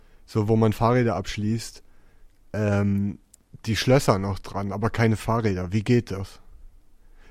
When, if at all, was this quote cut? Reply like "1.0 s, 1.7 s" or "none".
none